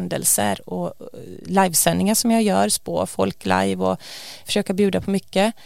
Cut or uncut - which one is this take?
cut